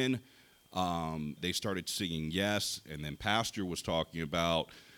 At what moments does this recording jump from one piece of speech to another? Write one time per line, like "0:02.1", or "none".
0:01.4